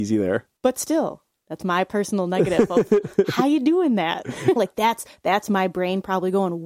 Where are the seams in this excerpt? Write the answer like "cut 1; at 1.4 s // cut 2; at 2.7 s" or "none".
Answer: cut 1; at 4.6 s